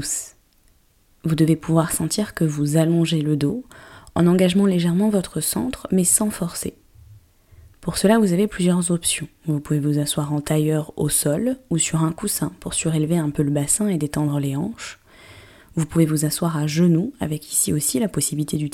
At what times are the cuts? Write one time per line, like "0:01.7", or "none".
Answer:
none